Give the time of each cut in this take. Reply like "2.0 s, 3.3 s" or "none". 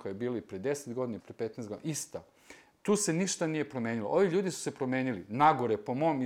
1.2 s